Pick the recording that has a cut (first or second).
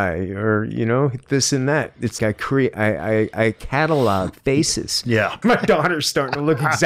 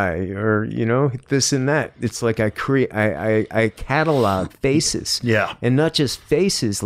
first